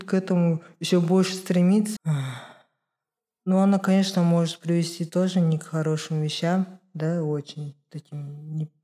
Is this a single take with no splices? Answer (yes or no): no